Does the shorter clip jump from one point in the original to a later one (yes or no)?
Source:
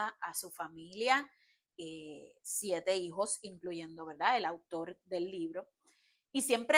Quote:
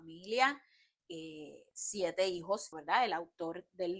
yes